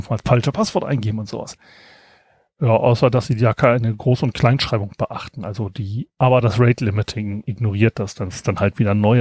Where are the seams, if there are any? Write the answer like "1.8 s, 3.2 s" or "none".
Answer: 6.1 s